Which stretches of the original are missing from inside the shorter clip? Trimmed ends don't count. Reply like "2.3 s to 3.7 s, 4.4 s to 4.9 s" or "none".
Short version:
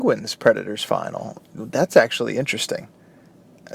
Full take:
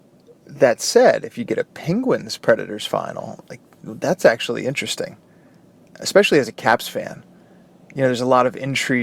3.5 s to 3.7 s

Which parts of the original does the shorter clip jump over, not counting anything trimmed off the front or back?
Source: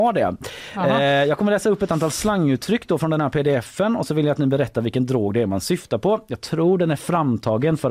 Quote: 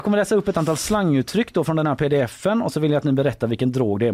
none

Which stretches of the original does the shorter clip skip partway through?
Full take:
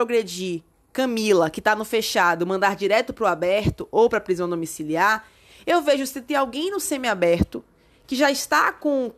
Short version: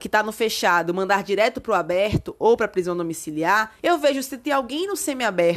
5.3 s to 5.6 s

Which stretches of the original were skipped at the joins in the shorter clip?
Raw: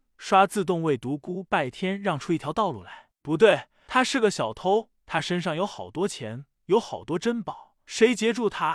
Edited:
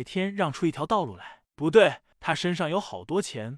3.8 s to 5.0 s

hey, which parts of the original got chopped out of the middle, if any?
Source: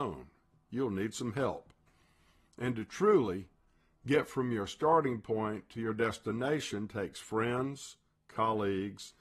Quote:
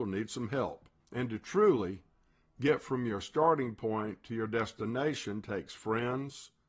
1.8 s to 2.5 s

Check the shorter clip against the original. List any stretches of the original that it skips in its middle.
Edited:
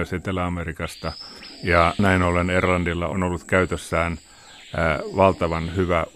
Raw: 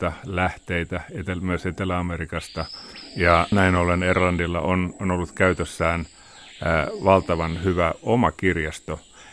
4.6 s to 5.0 s

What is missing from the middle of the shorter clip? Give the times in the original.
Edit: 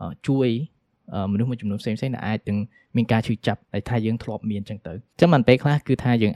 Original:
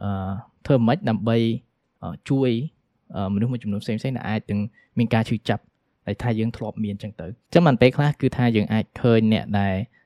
5.7 s to 6.0 s

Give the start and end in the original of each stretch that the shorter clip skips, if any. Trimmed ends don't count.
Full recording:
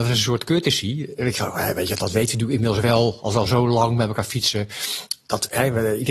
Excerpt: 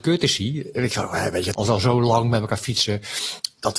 2.0 s to 3.2 s

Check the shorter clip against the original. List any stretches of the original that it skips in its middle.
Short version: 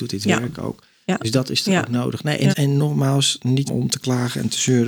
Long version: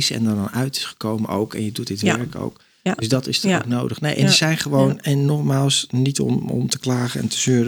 4.3 s to 5.0 s, 6.1 s to 6.4 s

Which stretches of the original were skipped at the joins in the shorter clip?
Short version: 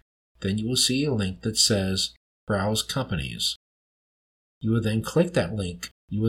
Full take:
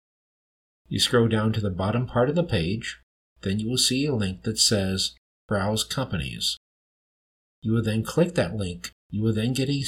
none

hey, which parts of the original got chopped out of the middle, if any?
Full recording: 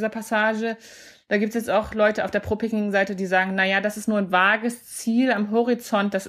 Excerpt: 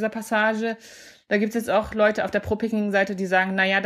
none

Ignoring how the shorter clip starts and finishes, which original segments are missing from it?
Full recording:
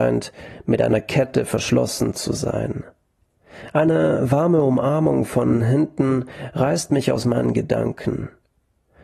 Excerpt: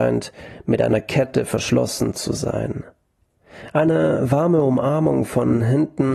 none

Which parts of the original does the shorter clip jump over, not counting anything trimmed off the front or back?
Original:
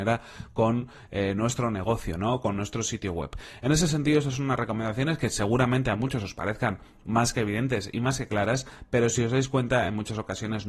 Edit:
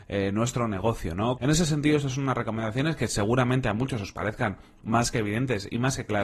2.4 s to 3.6 s

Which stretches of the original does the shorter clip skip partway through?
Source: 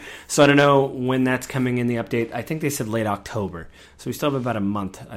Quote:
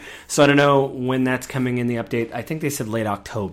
none

